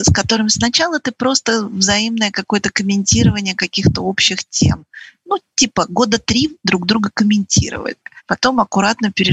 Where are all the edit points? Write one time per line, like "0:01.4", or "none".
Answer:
none